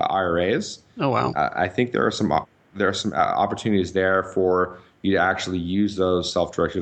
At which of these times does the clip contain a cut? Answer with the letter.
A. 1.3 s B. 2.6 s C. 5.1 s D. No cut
A